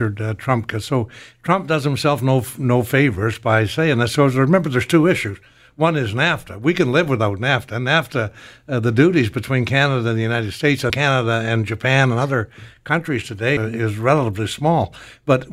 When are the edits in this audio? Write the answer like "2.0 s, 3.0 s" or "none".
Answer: 10.9 s, 13.6 s